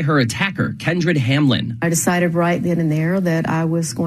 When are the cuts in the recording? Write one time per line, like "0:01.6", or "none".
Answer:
none